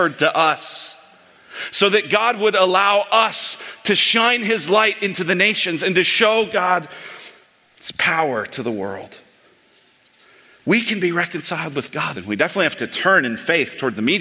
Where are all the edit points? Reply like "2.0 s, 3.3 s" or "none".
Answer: 12.1 s